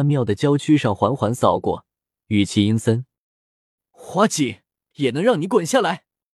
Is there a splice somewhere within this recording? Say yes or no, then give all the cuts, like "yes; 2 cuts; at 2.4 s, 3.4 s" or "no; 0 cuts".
yes; 1 cut; at 4.9 s